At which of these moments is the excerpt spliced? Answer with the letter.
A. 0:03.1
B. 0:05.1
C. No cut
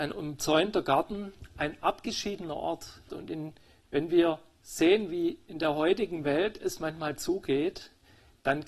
A